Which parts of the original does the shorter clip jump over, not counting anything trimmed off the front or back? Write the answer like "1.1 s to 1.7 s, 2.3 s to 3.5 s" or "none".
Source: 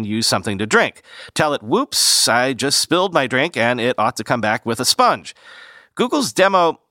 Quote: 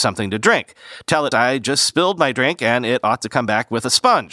1.6 s to 2.3 s